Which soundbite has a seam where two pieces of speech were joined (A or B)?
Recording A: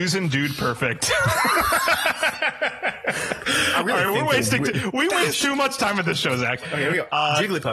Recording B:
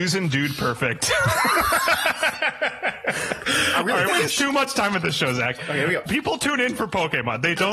B